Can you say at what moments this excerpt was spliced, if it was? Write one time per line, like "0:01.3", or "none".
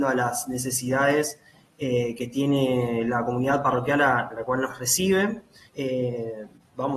0:05.7

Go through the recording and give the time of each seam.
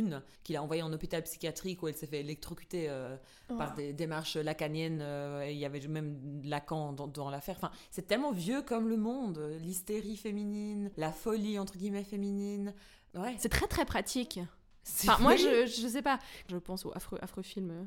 none

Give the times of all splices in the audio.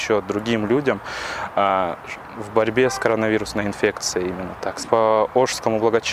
0:04.8

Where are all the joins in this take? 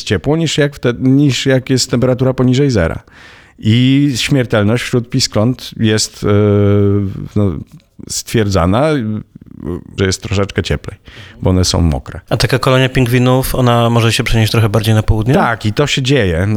0:10.0

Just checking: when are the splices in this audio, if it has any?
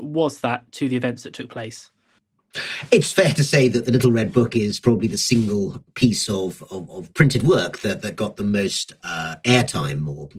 0:09.0

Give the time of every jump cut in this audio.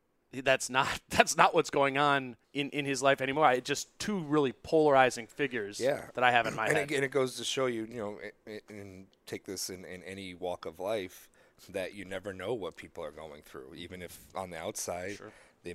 0:02.4

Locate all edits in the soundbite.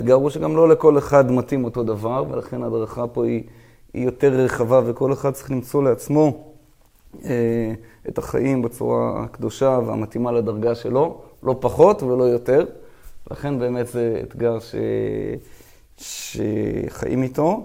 none

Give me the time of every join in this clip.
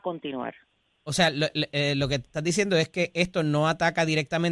none

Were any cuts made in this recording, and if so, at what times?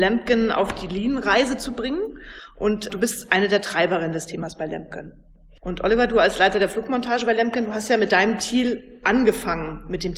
0:02.9

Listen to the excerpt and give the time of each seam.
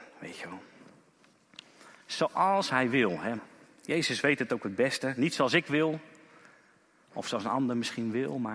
0:03.4

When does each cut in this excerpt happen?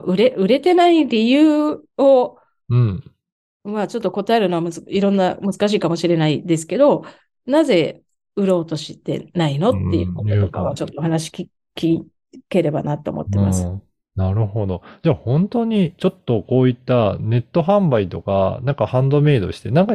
none

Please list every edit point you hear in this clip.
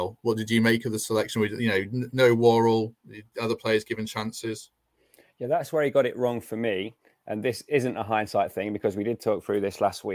0:03.0

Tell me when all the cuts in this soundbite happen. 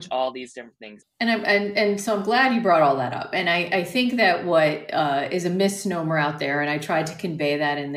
0:01.0

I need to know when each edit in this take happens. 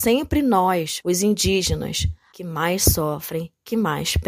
0:01.0
0:02.3

